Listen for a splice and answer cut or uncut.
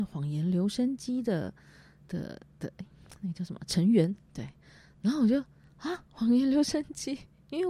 uncut